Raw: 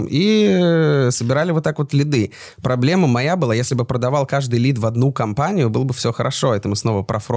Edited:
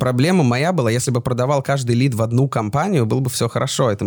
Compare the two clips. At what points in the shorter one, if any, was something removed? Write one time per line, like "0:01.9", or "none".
none

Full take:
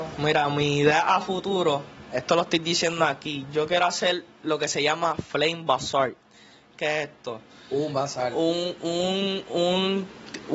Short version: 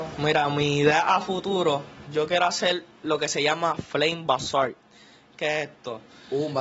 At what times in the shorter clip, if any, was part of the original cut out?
0:02.1

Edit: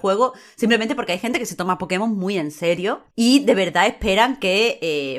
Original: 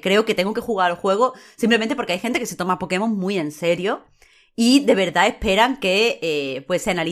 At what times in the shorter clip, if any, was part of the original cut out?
0:03.1

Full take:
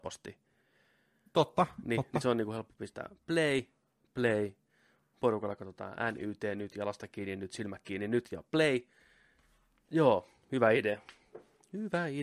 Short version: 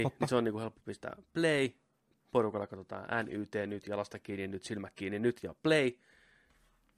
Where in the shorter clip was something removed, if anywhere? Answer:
0:02.2

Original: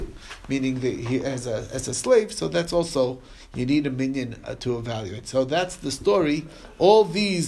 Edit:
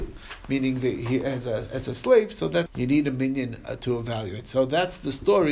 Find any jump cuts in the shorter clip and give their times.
0:02.7

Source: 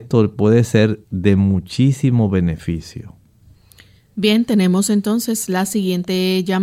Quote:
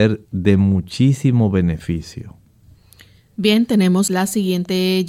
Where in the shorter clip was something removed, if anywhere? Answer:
0:04.1

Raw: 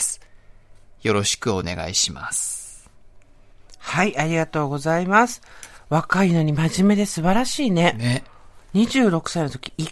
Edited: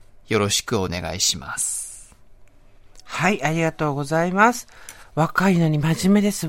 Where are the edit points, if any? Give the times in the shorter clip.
none

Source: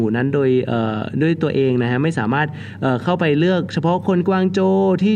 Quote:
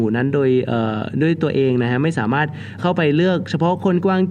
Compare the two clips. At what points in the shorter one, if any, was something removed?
0:02.8

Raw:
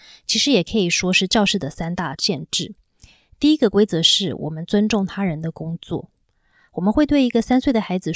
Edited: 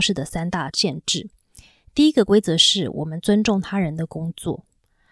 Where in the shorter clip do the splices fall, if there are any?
none

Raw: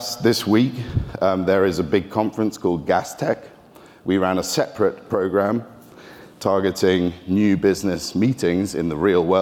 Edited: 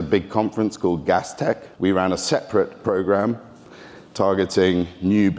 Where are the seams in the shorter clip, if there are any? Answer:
0:01.7

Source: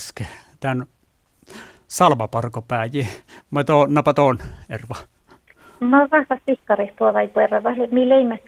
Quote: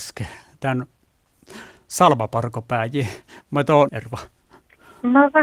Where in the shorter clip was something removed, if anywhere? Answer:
0:03.9

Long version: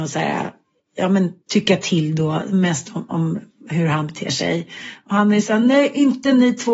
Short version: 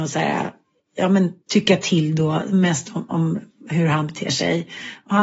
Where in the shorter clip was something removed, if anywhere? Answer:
none

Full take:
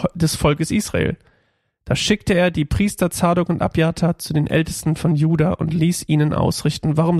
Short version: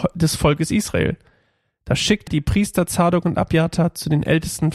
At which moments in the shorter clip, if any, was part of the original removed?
0:02.3

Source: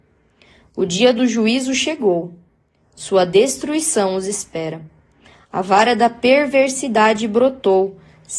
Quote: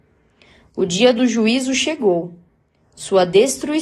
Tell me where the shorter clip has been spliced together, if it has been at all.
none

